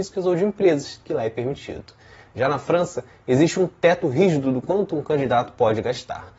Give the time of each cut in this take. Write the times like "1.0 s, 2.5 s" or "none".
none